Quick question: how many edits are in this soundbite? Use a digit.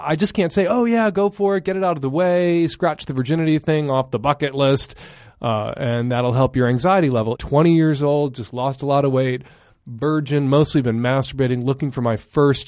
1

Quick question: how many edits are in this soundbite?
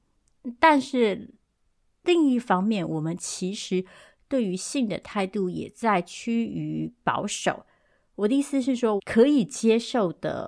1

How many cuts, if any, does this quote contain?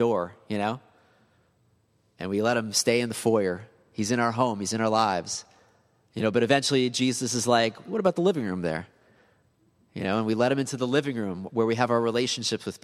0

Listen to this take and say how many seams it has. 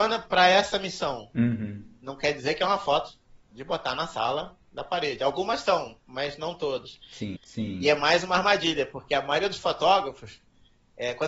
1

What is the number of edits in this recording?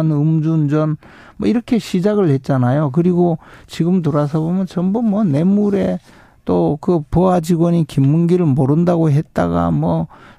0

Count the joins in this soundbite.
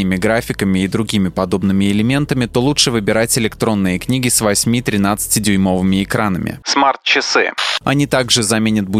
2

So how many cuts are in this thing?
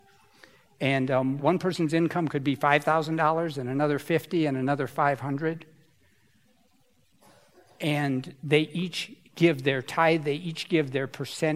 1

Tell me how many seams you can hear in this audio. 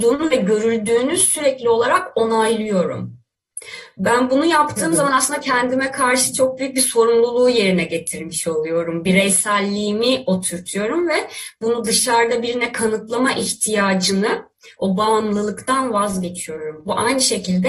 0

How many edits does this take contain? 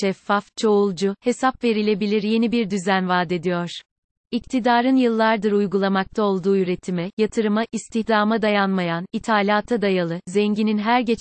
1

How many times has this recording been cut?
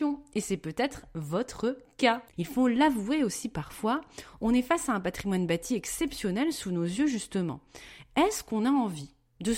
1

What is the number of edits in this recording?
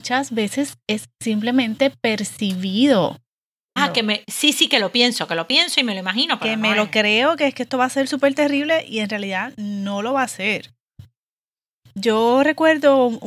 1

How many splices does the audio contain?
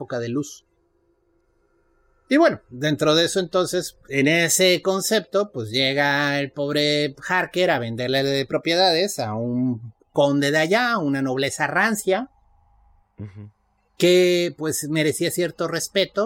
0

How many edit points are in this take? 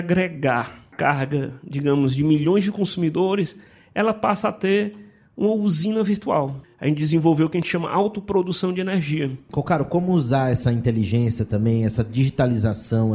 0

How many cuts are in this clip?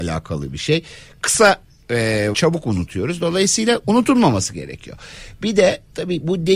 1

